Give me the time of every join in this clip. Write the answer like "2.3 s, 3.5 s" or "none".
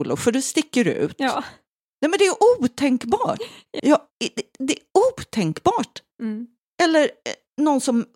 3.8 s

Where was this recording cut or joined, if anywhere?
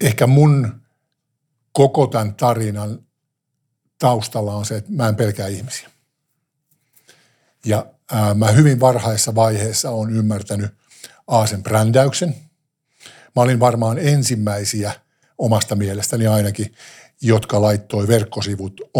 none

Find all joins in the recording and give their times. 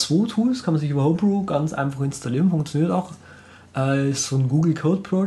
none

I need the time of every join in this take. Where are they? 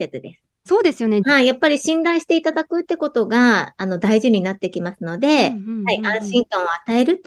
1.2 s

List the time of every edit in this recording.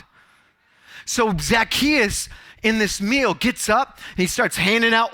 none

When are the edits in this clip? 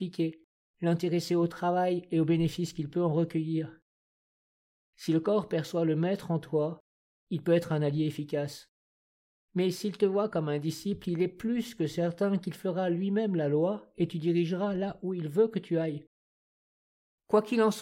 none

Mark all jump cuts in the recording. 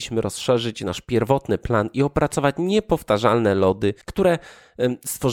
4.0 s

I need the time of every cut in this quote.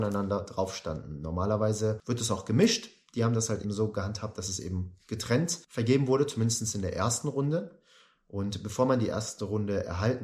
3.6 s

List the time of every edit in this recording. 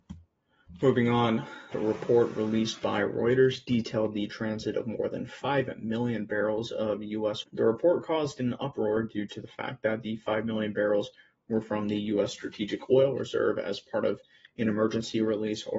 1.7 s, 7.4 s

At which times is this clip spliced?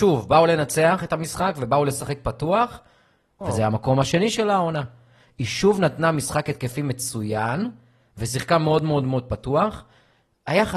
3.4 s

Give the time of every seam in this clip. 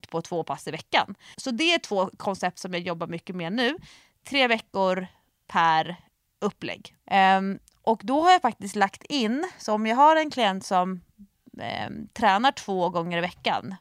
1.3 s, 7.0 s

